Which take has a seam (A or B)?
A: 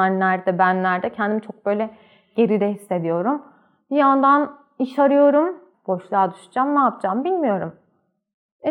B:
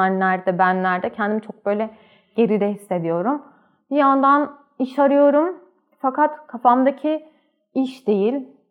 A